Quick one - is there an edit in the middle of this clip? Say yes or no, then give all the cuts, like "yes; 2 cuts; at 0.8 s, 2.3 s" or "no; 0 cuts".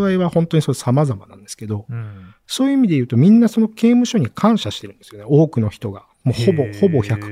no; 0 cuts